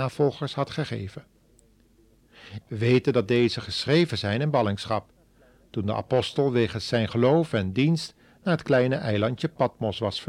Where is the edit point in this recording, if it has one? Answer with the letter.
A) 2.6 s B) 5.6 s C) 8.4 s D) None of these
A